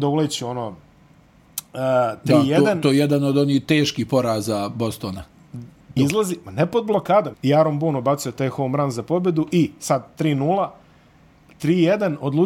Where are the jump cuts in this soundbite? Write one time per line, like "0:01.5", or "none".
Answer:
0:06.0
0:07.3